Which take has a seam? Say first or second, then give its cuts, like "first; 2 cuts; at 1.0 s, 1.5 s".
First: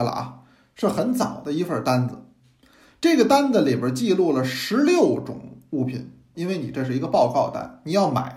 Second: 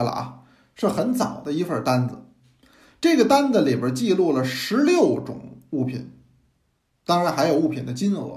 first; 1 cut; at 6.3 s